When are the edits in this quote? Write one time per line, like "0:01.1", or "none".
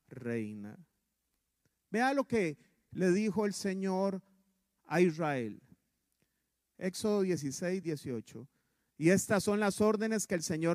0:07.8